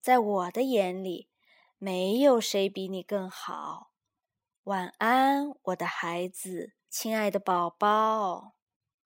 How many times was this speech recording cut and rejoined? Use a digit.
1